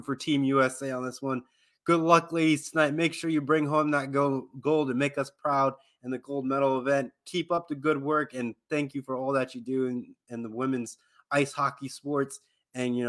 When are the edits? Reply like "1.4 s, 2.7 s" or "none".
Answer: none

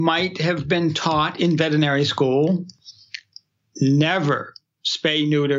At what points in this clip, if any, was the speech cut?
none

